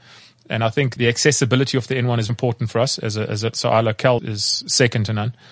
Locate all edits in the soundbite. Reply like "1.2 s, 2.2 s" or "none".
1.0 s, 2.3 s, 4.2 s